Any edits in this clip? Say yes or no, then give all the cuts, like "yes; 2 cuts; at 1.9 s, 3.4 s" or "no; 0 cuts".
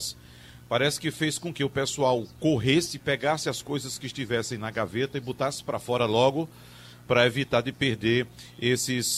no; 0 cuts